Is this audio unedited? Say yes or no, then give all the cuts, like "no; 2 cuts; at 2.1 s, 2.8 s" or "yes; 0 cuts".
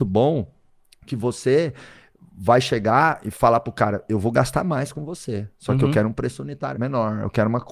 no; 1 cut; at 6.7 s